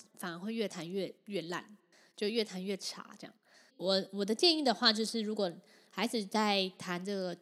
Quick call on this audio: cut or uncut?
cut